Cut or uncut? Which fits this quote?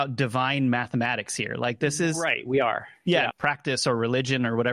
cut